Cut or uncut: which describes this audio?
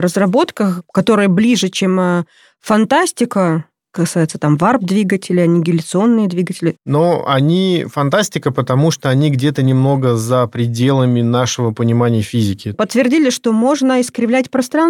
cut